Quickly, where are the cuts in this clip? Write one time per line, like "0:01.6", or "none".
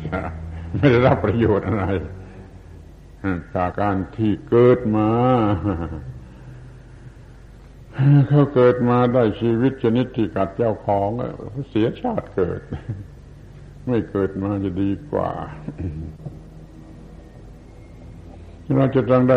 0:03.7